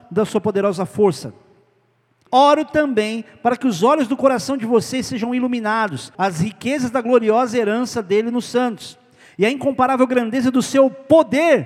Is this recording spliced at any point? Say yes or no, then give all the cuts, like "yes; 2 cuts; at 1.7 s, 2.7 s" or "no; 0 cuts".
yes; 2 cuts; at 2.3 s, 6.1 s